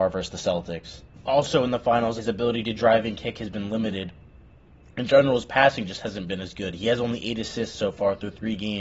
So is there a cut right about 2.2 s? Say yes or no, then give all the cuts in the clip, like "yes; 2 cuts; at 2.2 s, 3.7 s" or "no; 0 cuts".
yes; 1 cut; at 2.2 s